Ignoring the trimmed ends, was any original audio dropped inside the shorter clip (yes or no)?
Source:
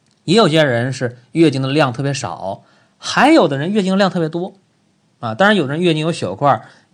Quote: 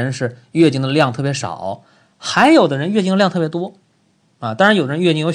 no